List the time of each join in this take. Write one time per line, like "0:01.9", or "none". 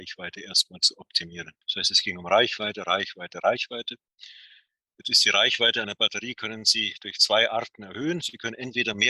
0:01.6

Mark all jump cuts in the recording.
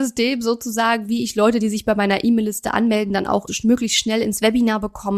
0:03.5

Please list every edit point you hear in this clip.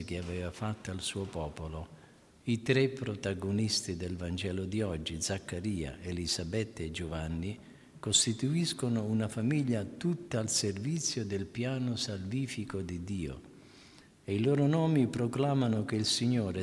none

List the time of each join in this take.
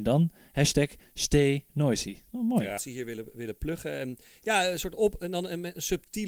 0:02.8

